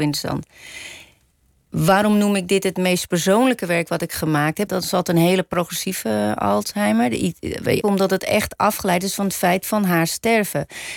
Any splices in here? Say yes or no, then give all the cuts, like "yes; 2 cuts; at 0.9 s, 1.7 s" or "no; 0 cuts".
yes; 2 cuts; at 4.7 s, 7.8 s